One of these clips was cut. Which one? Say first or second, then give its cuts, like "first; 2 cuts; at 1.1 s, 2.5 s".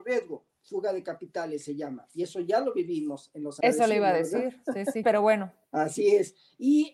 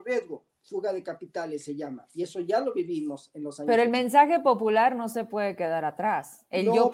first; 2 cuts; at 3.6 s, 5.0 s